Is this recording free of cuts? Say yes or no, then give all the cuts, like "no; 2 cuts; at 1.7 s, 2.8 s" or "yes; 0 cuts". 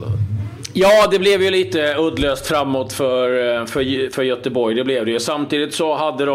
yes; 0 cuts